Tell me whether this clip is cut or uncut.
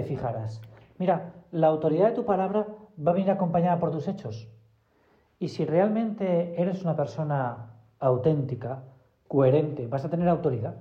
uncut